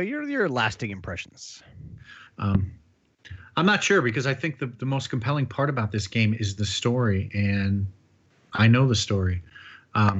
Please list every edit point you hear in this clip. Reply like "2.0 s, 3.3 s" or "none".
2.3 s